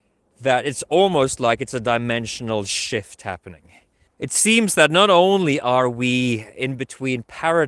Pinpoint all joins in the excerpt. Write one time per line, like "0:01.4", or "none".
0:04.1